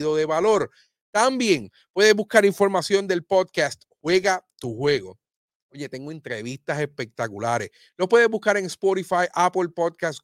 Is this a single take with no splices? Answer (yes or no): yes